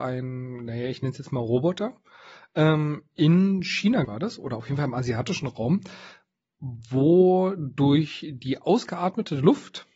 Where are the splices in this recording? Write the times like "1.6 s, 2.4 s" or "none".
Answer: 4.0 s